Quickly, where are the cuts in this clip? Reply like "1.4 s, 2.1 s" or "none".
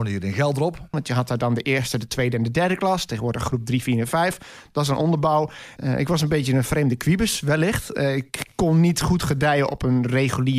0.9 s, 5.8 s